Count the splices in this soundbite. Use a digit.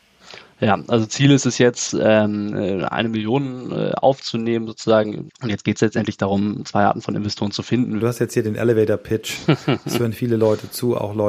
2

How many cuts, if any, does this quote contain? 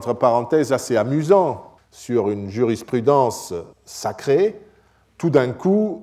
2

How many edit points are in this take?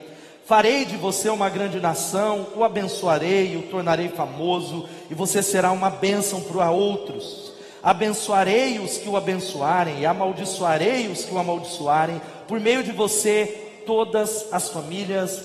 0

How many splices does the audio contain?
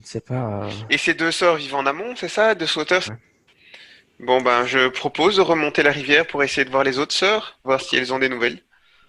2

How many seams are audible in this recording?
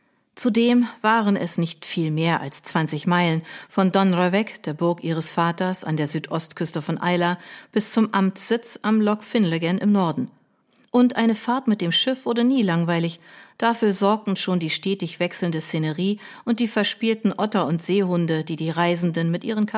0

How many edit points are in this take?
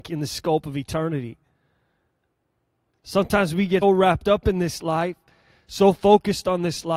1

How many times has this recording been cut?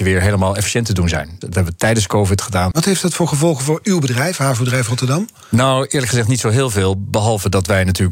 2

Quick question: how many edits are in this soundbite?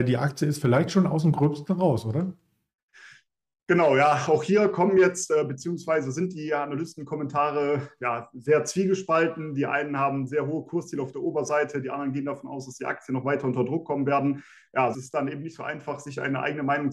1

